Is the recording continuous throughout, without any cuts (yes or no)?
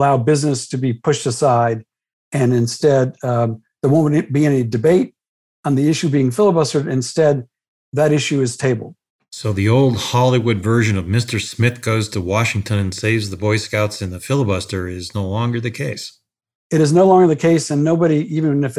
yes